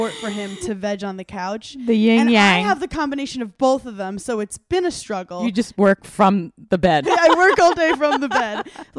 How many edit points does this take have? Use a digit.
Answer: 1